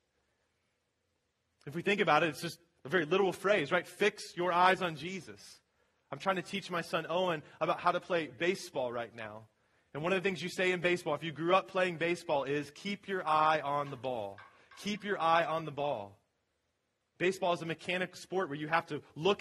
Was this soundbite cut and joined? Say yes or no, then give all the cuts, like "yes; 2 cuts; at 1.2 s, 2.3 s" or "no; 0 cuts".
no; 0 cuts